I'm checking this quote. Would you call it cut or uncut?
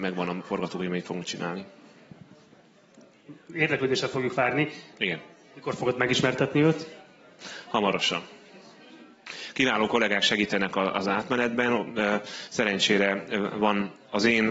cut